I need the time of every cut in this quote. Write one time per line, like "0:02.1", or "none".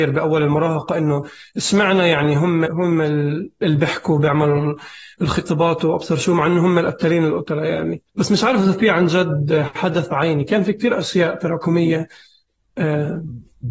0:02.7
0:08.1